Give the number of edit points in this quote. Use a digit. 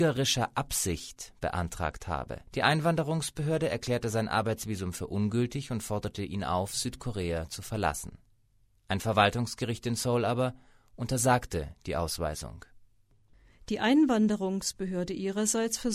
1